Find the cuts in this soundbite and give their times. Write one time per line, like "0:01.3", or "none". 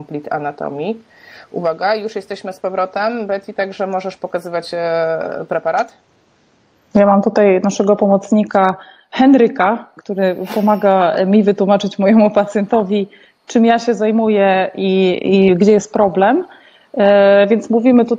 none